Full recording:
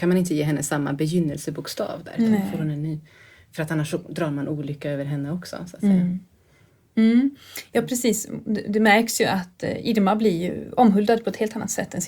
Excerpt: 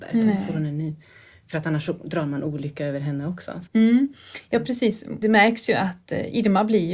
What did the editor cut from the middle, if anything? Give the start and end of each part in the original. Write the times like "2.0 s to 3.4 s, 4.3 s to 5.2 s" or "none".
5.7 s to 6.9 s, 8.4 s to 8.7 s